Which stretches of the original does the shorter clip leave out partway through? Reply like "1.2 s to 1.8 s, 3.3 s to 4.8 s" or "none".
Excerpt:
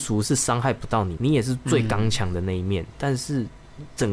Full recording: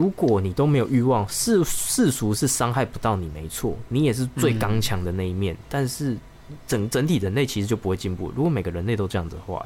3.3 s to 3.9 s